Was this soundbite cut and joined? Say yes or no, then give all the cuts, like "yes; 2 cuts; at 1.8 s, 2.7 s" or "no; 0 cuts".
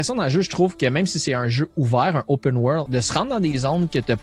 yes; 1 cut; at 2.9 s